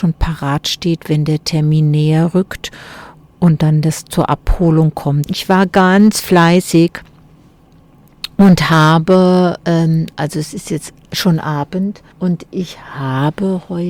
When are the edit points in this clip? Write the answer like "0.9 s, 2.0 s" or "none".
5.3 s, 9.6 s, 12.1 s